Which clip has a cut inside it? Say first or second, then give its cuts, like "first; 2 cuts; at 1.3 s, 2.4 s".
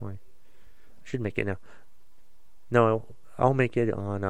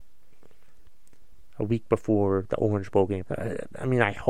second; 1 cut; at 3.2 s